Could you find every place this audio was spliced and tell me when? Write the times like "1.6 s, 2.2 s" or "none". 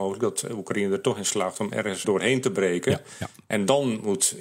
2.0 s